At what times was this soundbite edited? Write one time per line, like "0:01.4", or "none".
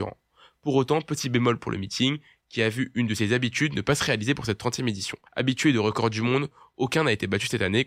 0:05.3

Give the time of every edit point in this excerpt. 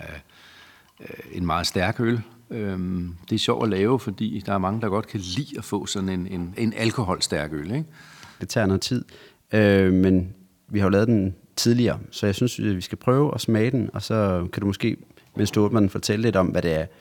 0:06.6
0:08.4

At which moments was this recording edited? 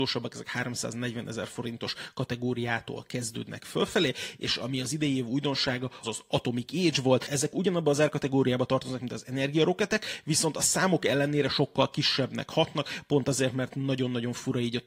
0:06.0

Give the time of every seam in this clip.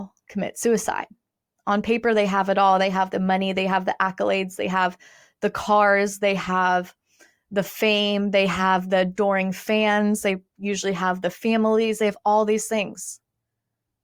0:01.6

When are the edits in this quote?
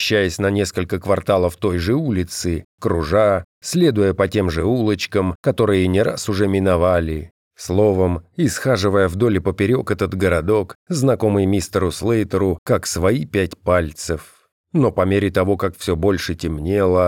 none

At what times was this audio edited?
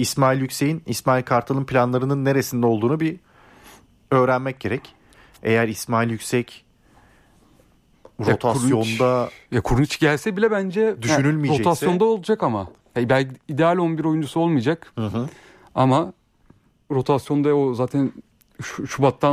none

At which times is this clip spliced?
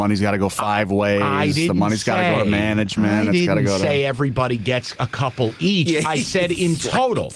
none

